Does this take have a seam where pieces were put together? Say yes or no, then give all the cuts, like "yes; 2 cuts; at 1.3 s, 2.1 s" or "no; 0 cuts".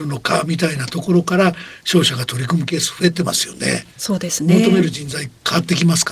no; 0 cuts